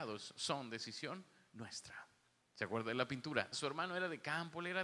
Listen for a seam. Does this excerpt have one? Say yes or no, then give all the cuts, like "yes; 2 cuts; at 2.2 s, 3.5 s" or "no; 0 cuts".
yes; 2 cuts; at 2.4 s, 3.5 s